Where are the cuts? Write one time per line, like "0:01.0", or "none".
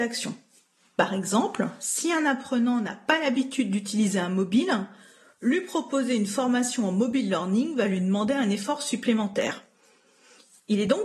none